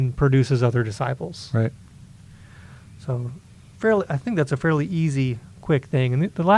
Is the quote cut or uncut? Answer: uncut